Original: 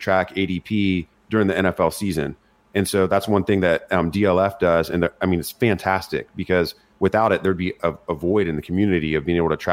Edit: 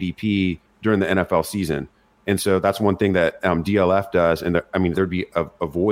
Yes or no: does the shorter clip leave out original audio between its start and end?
yes